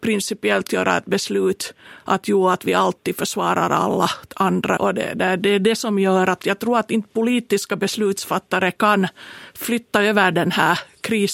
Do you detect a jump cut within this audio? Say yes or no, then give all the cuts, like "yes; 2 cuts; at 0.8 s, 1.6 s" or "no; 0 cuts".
yes; 1 cut; at 4.8 s